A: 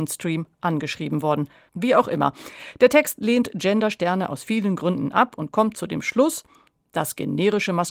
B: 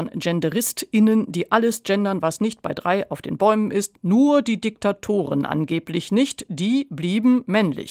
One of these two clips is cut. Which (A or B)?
A